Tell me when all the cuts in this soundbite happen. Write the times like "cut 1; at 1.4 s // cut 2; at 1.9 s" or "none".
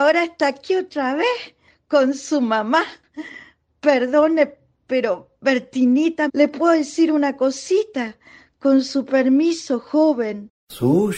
cut 1; at 6.3 s